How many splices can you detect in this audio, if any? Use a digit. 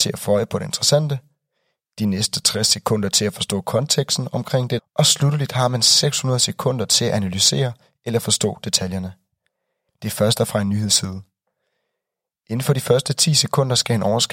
2